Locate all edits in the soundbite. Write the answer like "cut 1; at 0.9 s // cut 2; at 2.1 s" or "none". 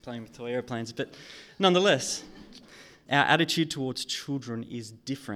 cut 1; at 3.1 s

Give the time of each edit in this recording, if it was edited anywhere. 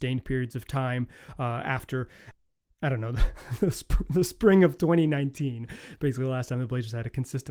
none

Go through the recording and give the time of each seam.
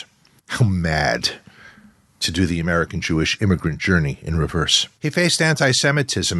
cut 1; at 5.0 s

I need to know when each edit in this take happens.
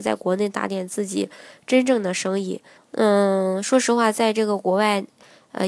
cut 1; at 2.8 s

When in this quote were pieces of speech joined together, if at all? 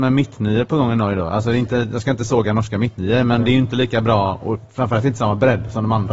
none

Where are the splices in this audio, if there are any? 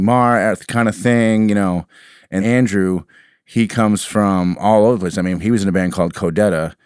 cut 1; at 2.4 s // cut 2; at 5.4 s

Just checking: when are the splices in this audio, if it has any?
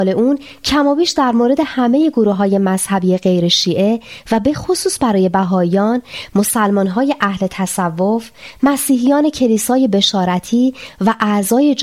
none

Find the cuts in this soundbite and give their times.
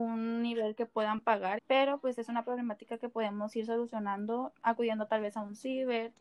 cut 1; at 1.6 s // cut 2; at 4.5 s

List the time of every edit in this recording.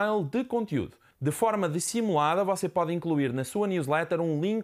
cut 1; at 1.1 s

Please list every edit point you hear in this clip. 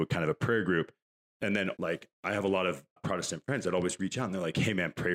cut 1; at 1.8 s // cut 2; at 3.0 s

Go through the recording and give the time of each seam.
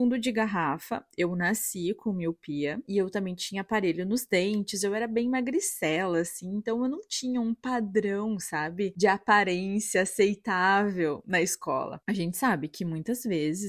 cut 1; at 2.8 s

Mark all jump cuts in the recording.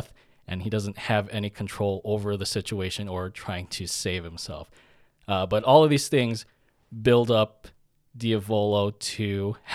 cut 1; at 5.1 s

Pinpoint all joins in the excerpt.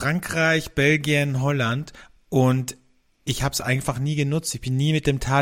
none

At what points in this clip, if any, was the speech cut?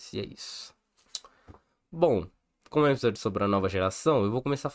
cut 1; at 2.6 s

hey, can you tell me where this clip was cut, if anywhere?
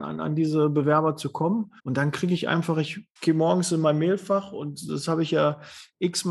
cut 1; at 1.8 s // cut 2; at 3.2 s

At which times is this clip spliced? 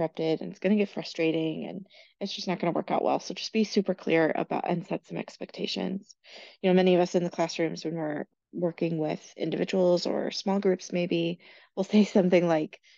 cut 1; at 8.3 s

